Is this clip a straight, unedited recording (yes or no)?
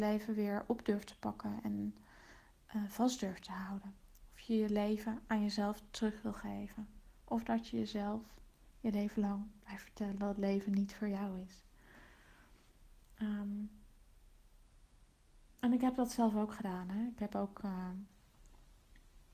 yes